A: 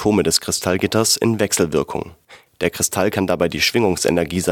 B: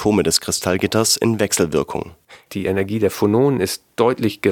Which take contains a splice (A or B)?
B